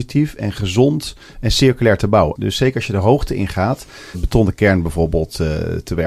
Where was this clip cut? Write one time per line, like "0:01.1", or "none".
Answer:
0:02.3
0:04.1